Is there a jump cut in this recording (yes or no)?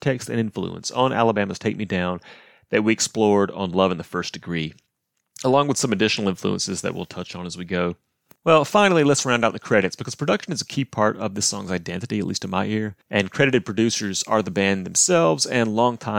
yes